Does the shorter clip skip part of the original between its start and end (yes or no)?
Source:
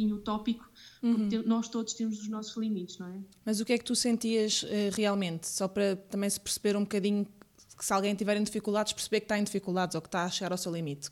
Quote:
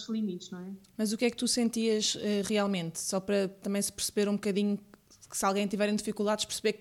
no